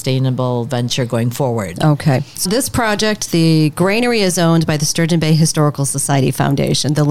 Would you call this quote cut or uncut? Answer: cut